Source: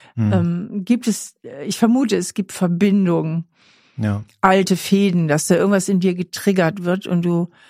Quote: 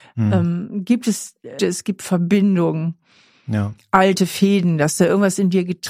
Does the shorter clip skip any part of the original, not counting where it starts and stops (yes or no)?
yes